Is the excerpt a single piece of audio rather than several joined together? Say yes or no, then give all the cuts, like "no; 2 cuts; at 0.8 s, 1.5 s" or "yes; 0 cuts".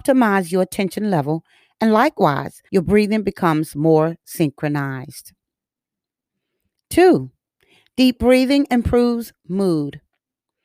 no; 1 cut; at 2.7 s